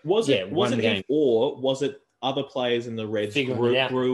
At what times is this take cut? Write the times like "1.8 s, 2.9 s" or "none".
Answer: 1.0 s